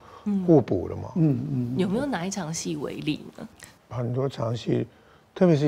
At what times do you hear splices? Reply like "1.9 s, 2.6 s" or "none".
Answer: 3.8 s